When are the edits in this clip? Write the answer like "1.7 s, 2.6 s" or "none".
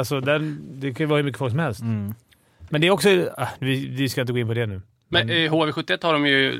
none